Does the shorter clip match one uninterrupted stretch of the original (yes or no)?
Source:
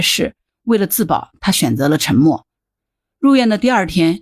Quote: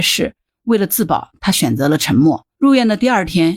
no